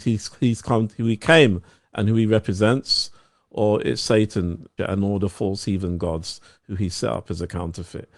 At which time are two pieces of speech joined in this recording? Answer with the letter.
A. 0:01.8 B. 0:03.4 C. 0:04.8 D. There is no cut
C